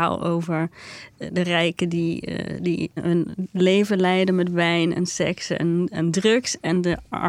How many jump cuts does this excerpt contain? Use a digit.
1